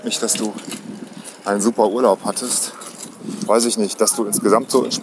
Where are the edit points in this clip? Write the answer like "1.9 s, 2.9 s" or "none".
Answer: 3.5 s